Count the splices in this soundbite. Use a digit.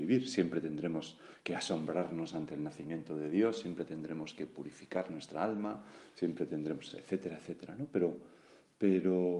0